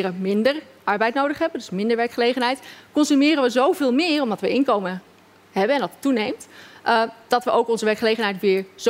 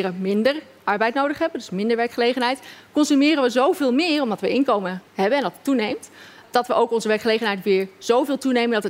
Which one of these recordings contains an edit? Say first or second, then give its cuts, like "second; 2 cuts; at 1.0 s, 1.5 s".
second; 2 cuts; at 5.1 s, 6.4 s